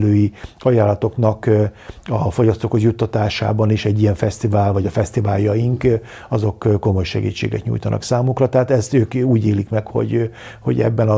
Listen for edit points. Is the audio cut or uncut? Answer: uncut